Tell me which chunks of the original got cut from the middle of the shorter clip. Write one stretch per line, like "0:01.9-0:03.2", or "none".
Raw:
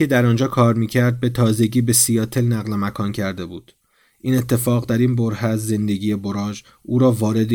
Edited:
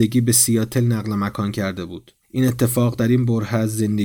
0:03.8-0:04.1